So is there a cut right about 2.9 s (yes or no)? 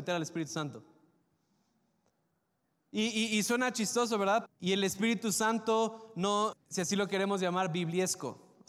no